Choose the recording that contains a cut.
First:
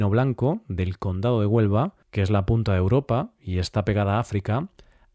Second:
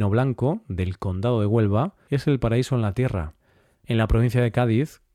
first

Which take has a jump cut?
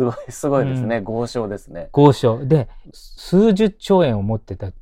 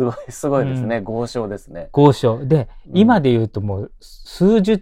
first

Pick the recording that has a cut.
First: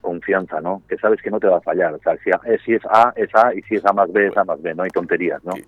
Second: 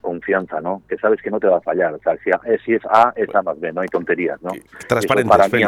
second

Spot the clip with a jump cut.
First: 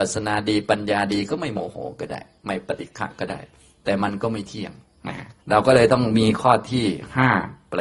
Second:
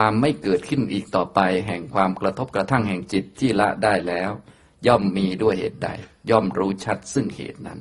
first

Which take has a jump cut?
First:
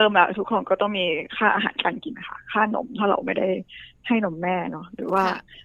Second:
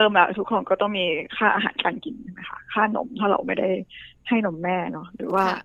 first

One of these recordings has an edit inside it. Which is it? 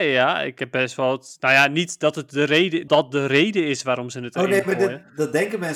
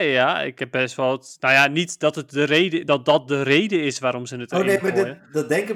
first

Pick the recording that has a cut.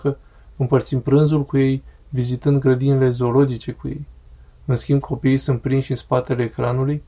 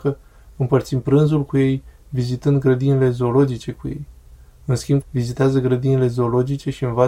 second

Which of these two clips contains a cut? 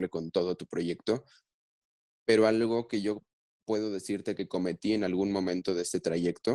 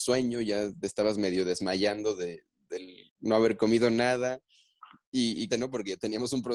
second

